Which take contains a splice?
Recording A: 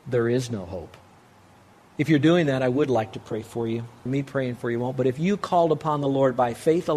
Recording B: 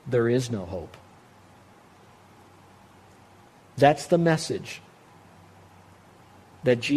A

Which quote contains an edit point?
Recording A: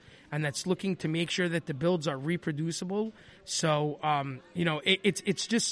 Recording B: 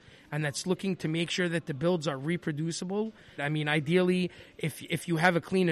B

